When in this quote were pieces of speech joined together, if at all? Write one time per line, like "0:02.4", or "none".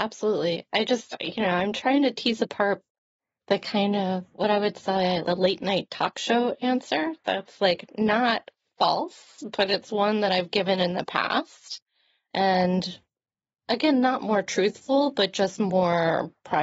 0:05.2